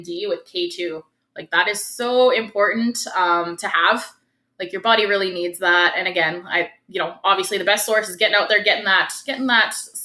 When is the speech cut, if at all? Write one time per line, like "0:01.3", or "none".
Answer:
none